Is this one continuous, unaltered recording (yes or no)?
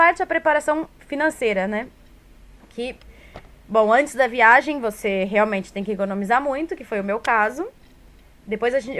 yes